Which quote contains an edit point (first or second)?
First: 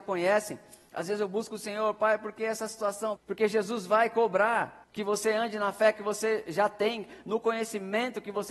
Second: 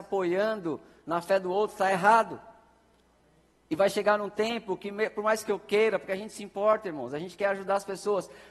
first